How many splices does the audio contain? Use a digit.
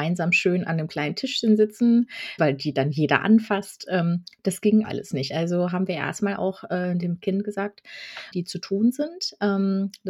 3